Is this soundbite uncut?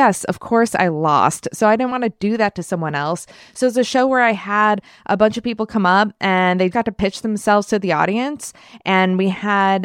no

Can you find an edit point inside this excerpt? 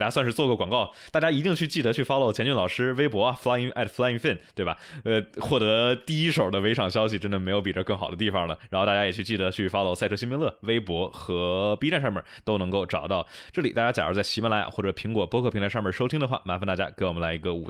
no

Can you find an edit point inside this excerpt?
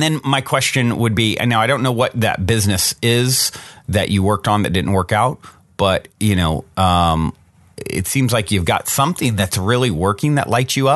yes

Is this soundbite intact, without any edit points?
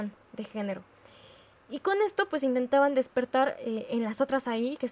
yes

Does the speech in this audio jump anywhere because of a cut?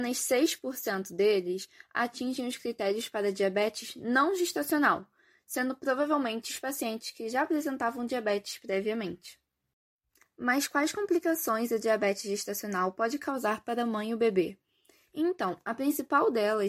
no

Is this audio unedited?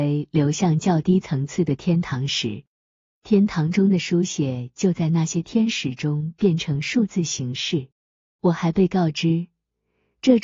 yes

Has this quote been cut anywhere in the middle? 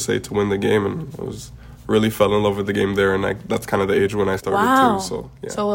no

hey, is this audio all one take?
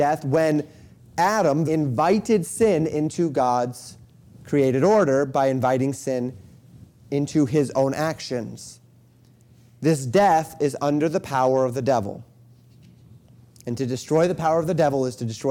no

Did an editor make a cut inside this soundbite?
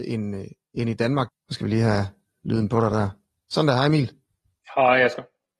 yes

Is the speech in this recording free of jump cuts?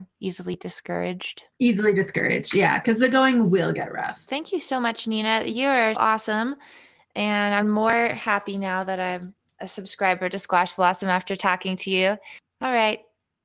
no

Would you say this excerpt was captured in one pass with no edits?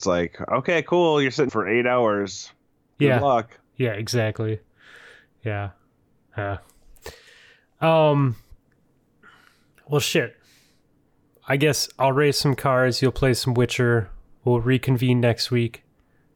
no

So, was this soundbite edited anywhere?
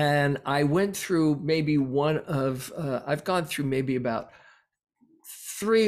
no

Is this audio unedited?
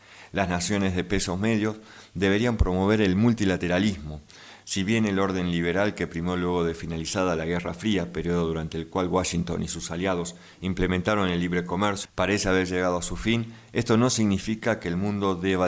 no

